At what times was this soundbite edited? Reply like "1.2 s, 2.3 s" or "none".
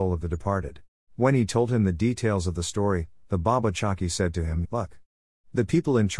1.0 s, 4.6 s